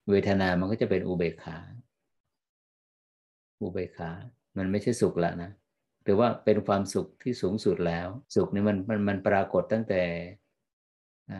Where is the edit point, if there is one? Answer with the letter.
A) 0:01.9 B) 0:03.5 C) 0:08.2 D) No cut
C